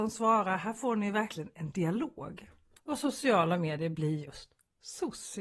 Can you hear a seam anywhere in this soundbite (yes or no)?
no